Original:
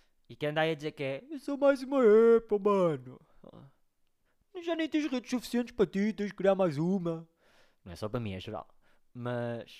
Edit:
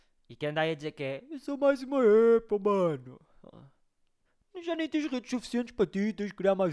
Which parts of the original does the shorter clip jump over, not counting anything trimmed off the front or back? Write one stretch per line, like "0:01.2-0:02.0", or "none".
none